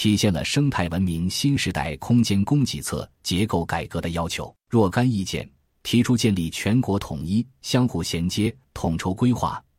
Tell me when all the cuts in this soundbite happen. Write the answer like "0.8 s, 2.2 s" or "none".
4.6 s, 8.6 s